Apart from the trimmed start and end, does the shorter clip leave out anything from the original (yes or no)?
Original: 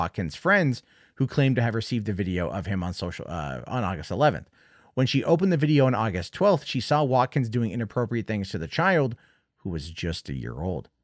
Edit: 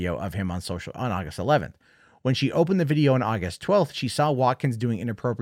yes